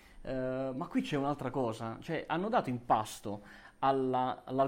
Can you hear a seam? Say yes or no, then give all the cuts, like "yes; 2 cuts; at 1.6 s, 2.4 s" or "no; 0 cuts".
no; 0 cuts